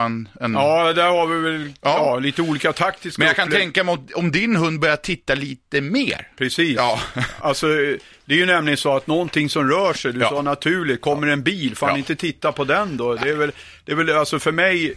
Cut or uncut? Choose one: uncut